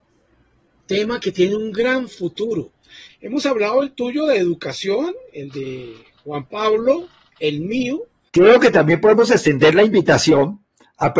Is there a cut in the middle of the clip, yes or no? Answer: yes